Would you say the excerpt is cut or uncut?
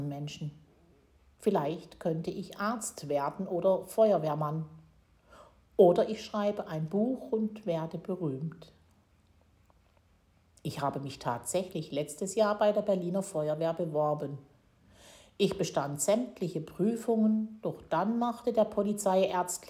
uncut